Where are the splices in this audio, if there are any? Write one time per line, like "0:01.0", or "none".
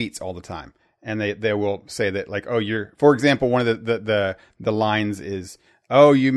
none